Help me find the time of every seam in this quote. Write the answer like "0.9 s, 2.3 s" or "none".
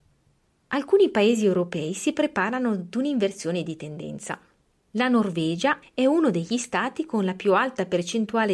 5.8 s